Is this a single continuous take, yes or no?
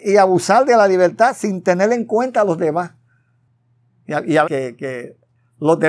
no